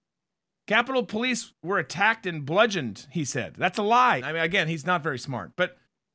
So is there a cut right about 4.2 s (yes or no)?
yes